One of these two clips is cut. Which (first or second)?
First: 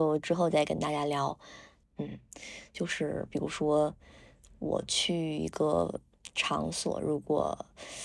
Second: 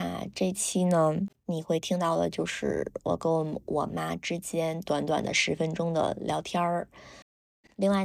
first